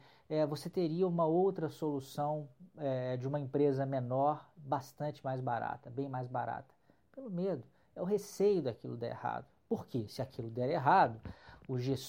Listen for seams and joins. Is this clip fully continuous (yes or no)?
yes